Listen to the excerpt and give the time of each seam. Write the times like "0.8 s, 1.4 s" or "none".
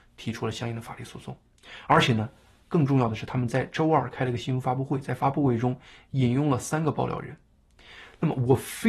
none